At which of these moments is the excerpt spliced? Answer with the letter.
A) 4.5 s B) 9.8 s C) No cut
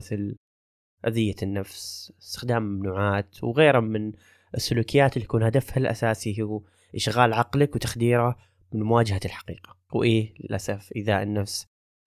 B